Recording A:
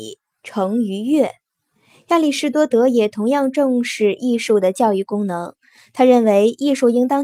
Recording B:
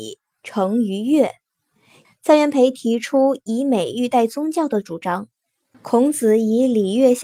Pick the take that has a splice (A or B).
B